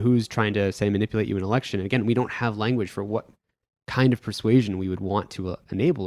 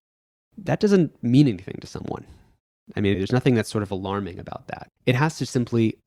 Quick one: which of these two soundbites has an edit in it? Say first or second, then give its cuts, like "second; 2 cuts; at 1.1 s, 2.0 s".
second; 2 cuts; at 3.1 s, 5.0 s